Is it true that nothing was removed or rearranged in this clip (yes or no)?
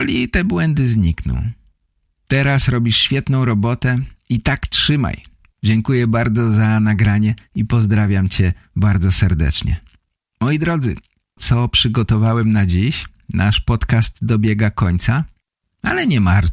no